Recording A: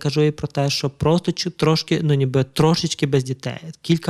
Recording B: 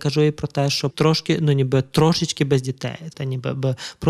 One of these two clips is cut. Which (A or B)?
B